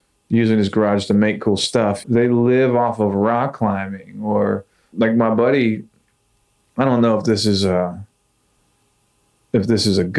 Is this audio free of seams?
no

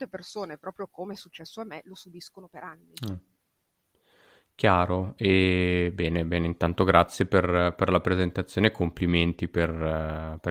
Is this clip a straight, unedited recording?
yes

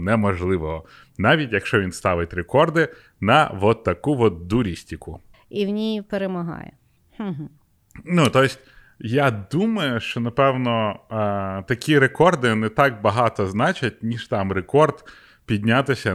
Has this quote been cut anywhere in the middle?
yes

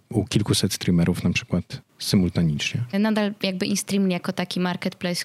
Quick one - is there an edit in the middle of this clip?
yes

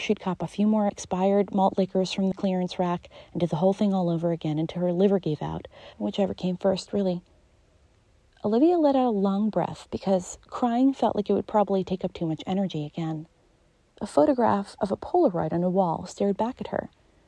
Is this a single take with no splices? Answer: no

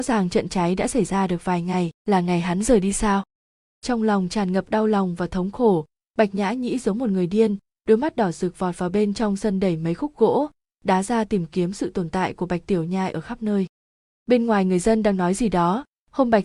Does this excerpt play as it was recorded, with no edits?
no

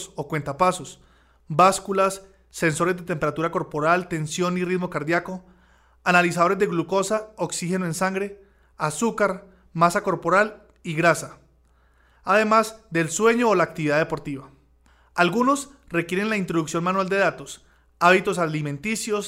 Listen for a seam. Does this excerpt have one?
no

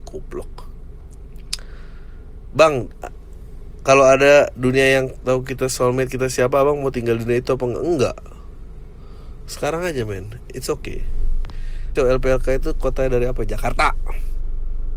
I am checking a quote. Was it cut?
yes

